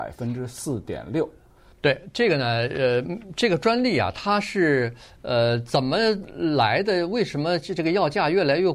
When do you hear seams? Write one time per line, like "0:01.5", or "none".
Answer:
0:01.7